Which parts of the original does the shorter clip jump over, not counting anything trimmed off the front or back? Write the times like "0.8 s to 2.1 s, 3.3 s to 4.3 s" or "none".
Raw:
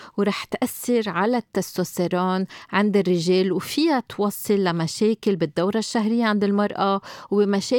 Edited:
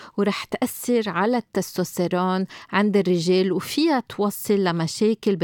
none